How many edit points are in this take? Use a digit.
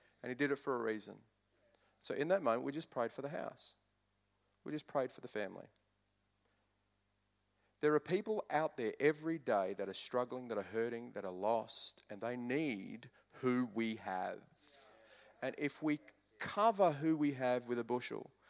0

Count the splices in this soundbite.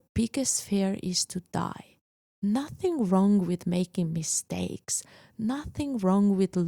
1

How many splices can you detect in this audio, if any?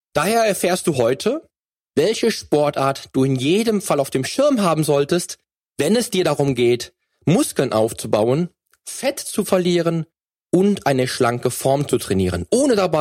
0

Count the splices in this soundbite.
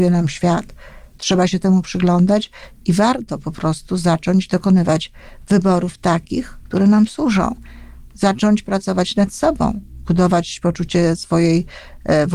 0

